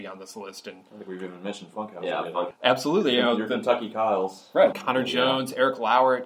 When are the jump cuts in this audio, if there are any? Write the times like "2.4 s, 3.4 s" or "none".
2.5 s, 4.7 s

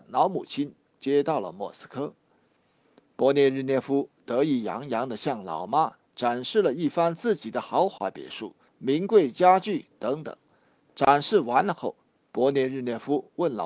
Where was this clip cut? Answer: 8.7 s

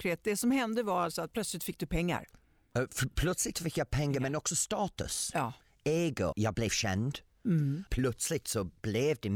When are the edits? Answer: 6.3 s, 7.9 s

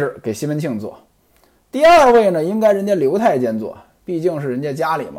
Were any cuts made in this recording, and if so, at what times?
none

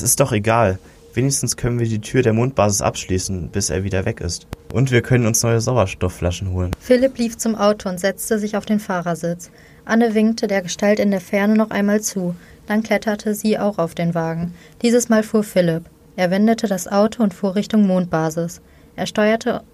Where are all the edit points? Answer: none

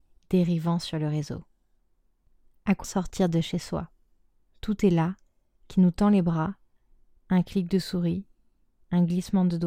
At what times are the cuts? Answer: 2.8 s

